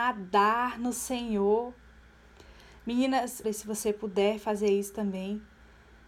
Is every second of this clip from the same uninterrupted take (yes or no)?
no